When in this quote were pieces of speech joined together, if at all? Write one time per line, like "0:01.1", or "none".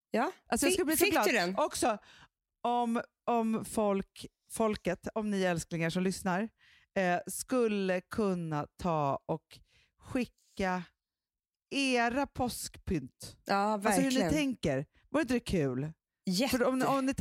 none